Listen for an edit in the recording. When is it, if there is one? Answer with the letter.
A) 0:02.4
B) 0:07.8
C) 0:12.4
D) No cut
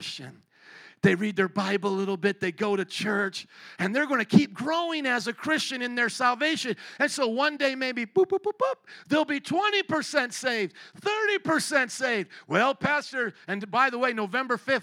D